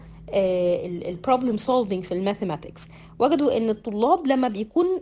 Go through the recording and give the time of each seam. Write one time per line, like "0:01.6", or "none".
none